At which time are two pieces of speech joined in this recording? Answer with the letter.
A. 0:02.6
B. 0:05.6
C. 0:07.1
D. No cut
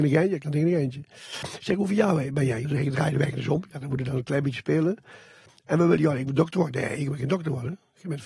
A